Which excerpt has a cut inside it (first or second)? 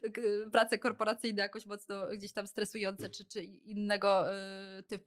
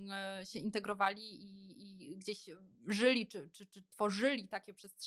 second